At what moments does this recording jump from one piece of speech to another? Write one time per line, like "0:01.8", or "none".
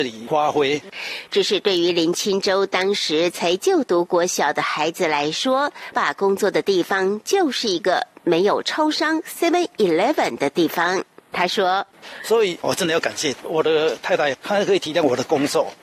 0:05.9
0:12.0